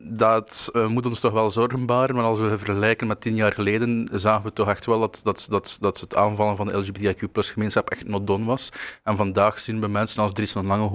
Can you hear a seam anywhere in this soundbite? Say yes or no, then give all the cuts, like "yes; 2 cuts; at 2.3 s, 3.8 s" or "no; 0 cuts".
no; 0 cuts